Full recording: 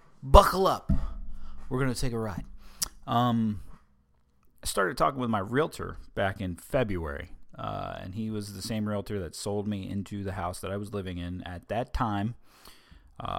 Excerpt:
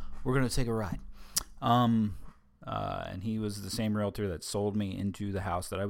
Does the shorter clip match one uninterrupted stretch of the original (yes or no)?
no